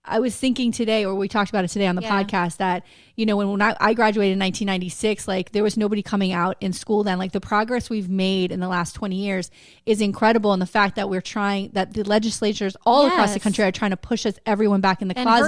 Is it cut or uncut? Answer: uncut